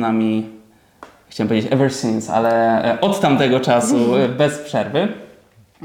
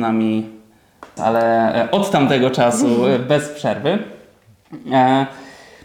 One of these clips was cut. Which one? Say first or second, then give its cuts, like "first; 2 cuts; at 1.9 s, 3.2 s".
second; 1 cut; at 1.2 s